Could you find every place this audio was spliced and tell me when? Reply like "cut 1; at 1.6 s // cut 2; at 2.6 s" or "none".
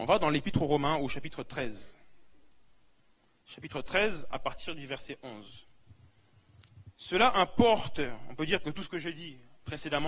none